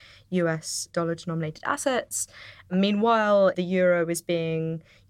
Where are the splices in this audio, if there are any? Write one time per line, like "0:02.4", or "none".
0:03.5